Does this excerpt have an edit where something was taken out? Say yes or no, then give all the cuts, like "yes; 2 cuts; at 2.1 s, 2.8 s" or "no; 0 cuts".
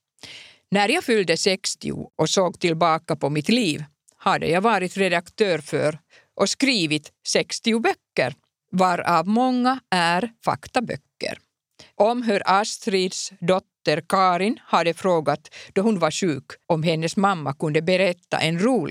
yes; 2 cuts; at 11.9 s, 16.6 s